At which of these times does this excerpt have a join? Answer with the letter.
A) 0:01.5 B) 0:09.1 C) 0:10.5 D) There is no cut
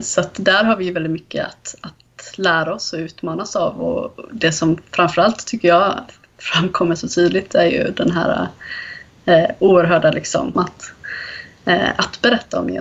C